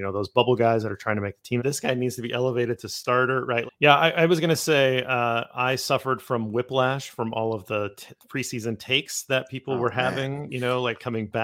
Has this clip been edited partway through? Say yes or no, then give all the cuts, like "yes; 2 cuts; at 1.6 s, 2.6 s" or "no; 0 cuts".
yes; 2 cuts; at 1.6 s, 3.7 s